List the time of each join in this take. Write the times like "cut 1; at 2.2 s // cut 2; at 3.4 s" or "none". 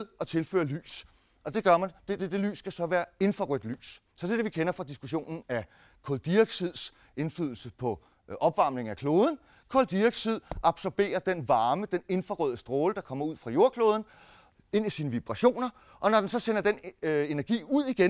cut 1; at 4.1 s

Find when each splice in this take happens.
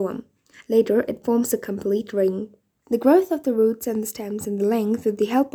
cut 1; at 2.8 s

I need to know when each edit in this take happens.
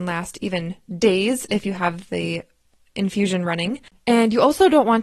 cut 1; at 4.0 s

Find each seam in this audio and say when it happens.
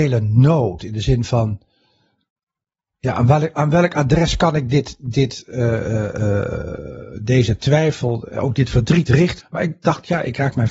cut 1; at 9.4 s

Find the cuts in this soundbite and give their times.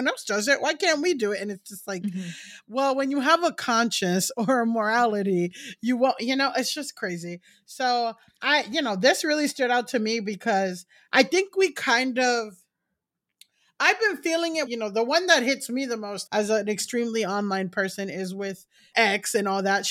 cut 1; at 14.7 s // cut 2; at 16.3 s // cut 3; at 18.9 s

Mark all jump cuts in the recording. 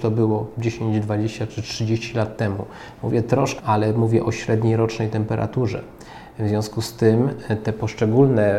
cut 1; at 3.6 s

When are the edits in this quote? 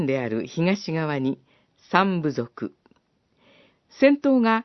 cut 1; at 3.7 s

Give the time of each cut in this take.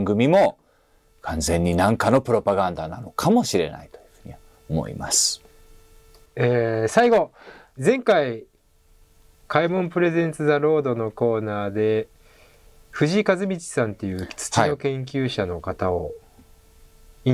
cut 1; at 6.3 s

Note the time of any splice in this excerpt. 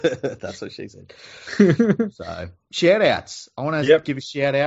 cut 1; at 2.7 s

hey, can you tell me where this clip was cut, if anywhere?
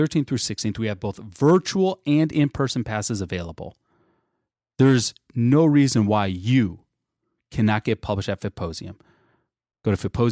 none

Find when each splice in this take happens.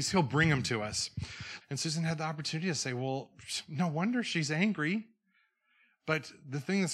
cut 1; at 1.6 s

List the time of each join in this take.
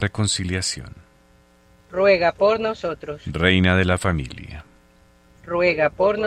none

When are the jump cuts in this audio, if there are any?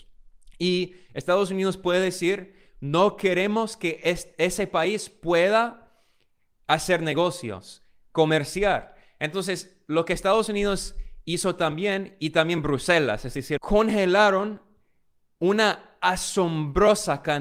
cut 1; at 13.6 s

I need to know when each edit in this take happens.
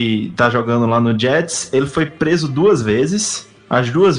none

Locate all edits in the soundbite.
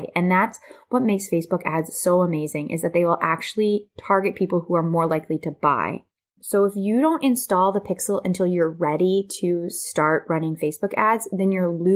cut 1; at 6.4 s

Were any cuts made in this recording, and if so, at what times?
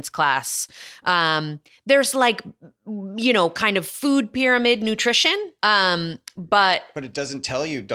cut 1; at 2.8 s // cut 2; at 5.6 s

